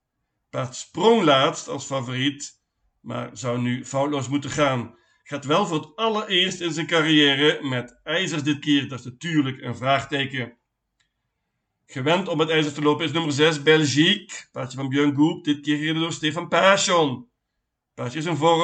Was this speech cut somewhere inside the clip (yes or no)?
no